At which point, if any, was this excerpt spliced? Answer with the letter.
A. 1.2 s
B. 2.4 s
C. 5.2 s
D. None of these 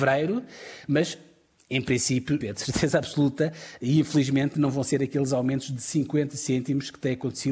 B